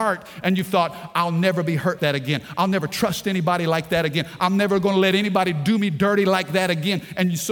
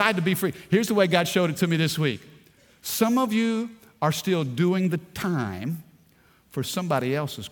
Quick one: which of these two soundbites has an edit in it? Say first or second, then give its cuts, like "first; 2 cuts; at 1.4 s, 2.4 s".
first; 1 cut; at 2.0 s